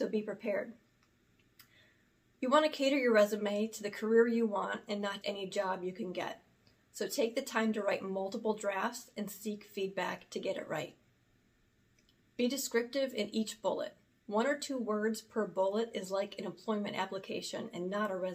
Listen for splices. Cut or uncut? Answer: cut